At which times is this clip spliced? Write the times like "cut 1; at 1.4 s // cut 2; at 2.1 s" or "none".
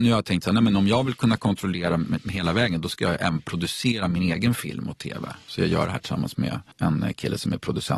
none

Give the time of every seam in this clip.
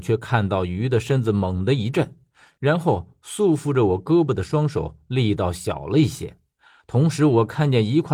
cut 1; at 6.8 s

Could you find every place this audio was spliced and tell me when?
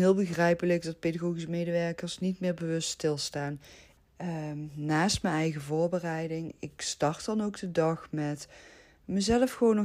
cut 1; at 4.0 s

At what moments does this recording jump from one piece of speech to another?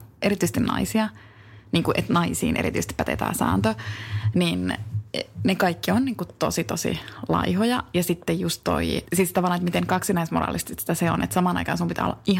none

